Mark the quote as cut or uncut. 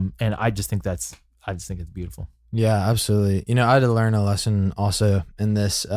uncut